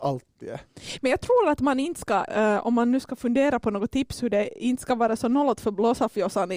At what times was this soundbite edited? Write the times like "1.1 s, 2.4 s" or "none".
2.3 s